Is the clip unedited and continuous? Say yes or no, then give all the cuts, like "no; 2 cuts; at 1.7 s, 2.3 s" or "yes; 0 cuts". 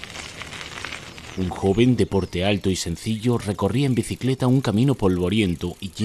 yes; 0 cuts